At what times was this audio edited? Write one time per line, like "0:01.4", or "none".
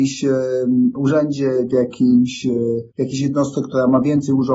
0:02.9